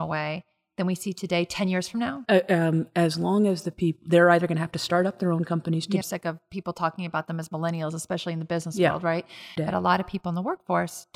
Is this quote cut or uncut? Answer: cut